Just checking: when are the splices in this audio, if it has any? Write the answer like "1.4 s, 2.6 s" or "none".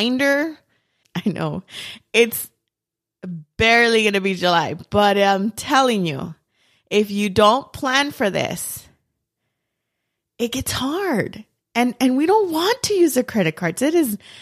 1.0 s